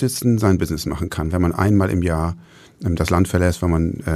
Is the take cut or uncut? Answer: uncut